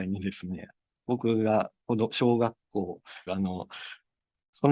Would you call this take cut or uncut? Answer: cut